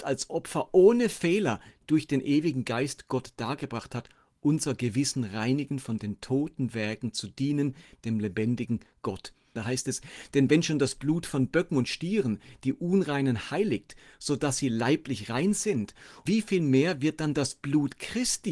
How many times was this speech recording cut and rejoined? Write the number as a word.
two